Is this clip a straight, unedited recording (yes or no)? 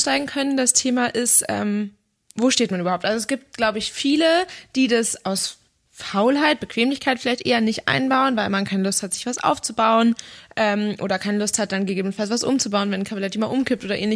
yes